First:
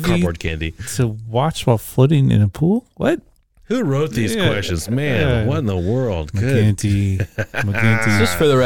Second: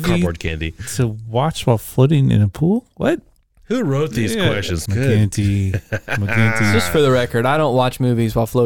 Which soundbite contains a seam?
second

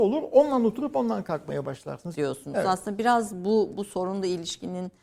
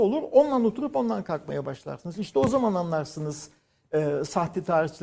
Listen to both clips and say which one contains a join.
first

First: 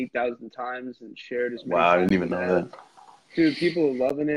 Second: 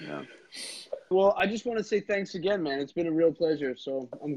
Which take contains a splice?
second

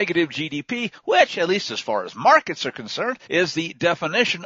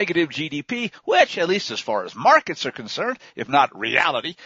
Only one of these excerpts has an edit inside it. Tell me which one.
first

